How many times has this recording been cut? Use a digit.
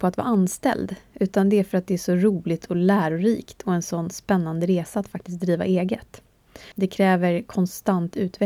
1